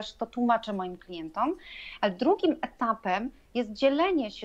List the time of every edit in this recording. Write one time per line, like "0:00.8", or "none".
none